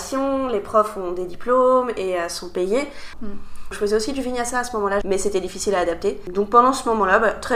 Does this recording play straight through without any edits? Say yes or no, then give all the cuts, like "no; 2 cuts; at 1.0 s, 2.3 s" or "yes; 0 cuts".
no; 2 cuts; at 3.1 s, 5.0 s